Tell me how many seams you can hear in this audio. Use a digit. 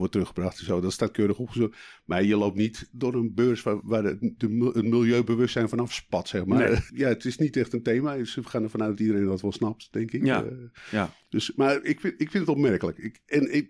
2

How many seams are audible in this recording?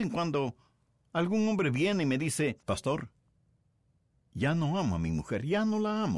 1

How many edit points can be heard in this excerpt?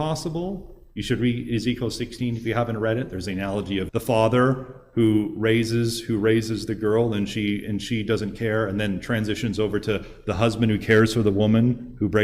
1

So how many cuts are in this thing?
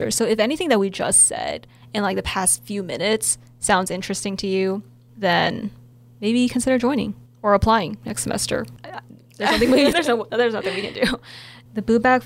2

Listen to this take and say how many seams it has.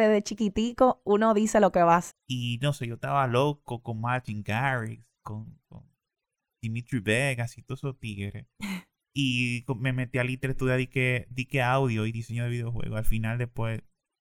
1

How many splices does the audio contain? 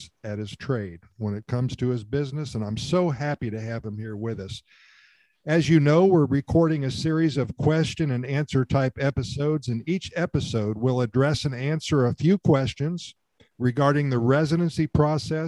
0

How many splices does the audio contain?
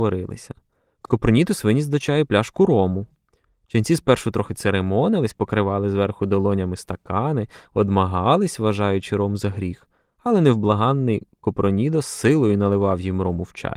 0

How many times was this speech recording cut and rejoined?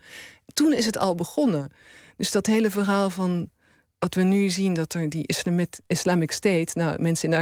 0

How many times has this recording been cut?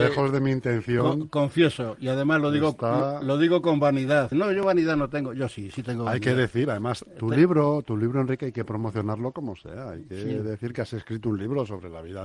1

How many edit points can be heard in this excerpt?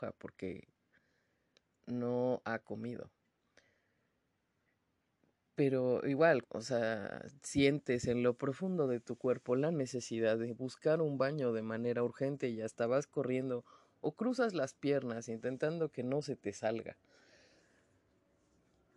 1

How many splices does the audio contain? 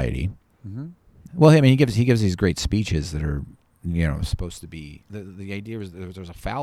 1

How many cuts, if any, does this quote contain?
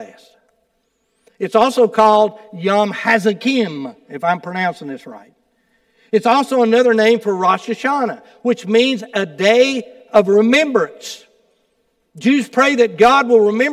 0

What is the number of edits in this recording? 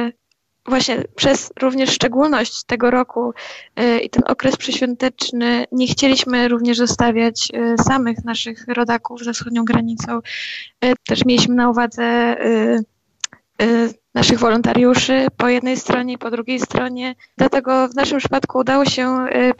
2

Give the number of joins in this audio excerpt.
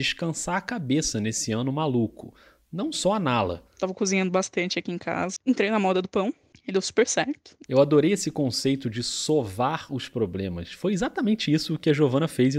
2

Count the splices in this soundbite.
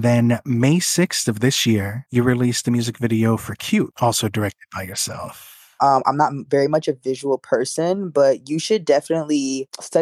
1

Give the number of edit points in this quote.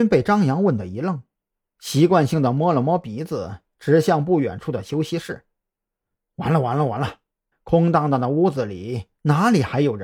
2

